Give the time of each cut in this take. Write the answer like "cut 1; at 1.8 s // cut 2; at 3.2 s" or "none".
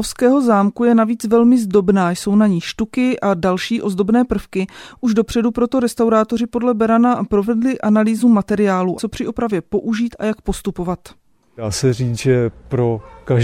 cut 1; at 9.0 s